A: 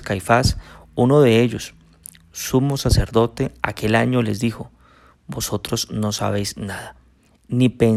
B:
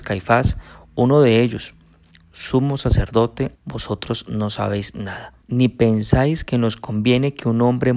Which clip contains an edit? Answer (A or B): B